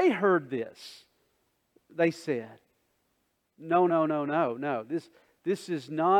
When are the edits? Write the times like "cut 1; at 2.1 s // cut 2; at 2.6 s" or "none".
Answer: cut 1; at 3.9 s

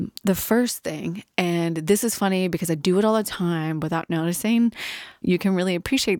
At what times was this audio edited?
cut 1; at 5.2 s

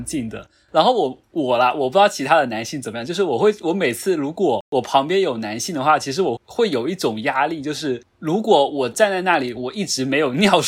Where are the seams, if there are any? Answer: cut 1; at 6.4 s

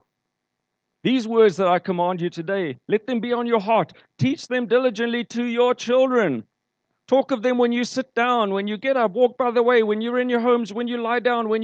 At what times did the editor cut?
none

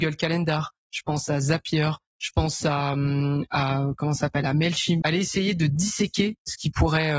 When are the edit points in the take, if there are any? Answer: cut 1; at 5.0 s

